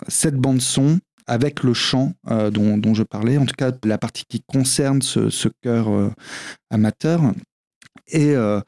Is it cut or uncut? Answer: cut